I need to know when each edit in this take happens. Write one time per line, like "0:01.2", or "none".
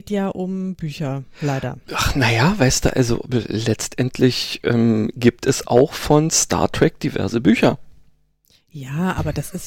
none